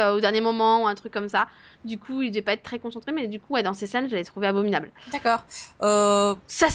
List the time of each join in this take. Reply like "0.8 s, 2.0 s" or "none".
none